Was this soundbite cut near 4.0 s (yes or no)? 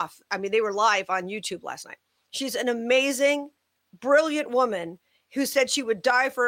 no